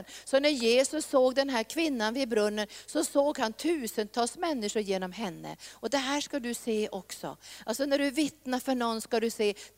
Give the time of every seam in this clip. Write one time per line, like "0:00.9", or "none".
none